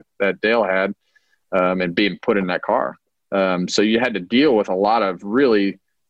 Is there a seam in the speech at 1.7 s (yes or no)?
no